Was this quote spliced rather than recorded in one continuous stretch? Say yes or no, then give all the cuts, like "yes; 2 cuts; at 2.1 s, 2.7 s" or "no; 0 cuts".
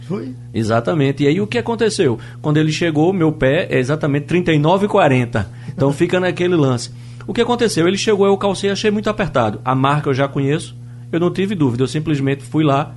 no; 0 cuts